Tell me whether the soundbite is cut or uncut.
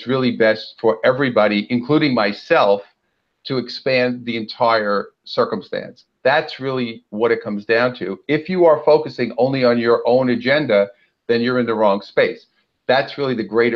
uncut